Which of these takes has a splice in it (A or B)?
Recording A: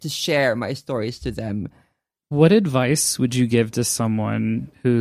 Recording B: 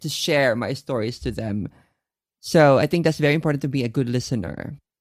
A